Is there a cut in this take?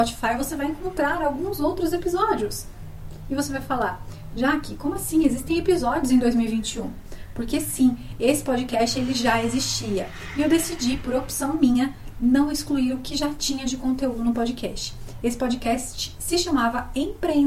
no; 0 cuts

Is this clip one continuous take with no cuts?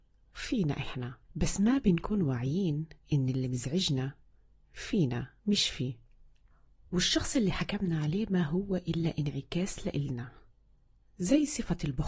no; 3 cuts; at 1.2 s, 3.0 s, 5.4 s

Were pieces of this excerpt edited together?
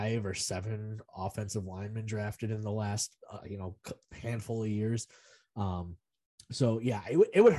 no; 0 cuts

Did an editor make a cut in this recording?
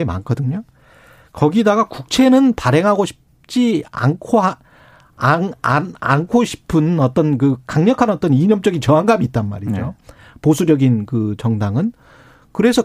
no; 0 cuts

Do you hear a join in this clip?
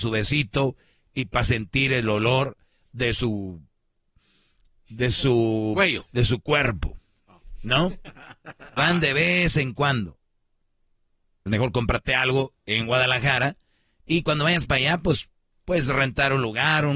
yes; 2 cuts; at 8.8 s, 11.5 s

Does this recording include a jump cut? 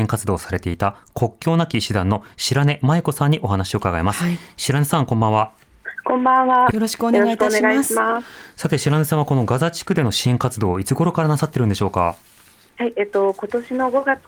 yes; 1 cut; at 6.7 s

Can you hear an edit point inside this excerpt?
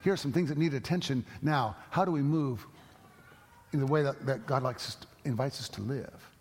no; 0 cuts

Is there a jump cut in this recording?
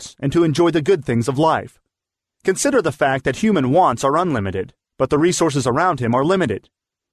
yes; 1 cut; at 2.4 s

